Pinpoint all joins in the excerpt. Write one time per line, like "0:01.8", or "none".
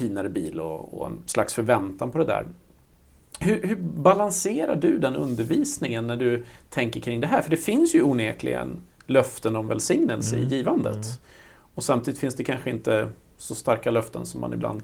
none